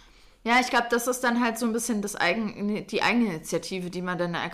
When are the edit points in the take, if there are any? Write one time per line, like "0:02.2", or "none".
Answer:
none